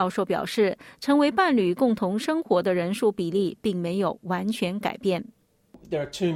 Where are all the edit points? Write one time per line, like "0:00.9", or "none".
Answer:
none